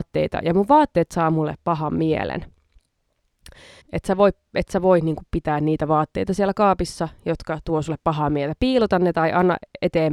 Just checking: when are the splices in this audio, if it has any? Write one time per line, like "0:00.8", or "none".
0:03.8